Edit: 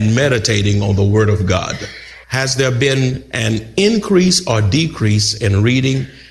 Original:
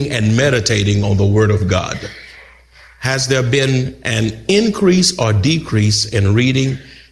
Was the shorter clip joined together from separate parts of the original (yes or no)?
yes